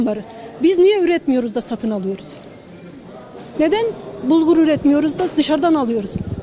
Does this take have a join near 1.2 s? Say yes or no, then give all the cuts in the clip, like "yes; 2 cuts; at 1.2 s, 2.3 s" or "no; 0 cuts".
no; 1 cut; at 3.5 s